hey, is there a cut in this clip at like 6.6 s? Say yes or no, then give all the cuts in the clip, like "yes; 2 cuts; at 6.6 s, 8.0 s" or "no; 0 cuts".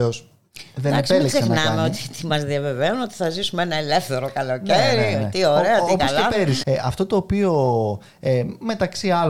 yes; 1 cut; at 6.6 s